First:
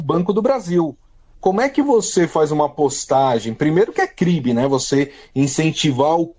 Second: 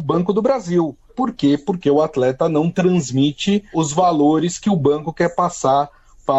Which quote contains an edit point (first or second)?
second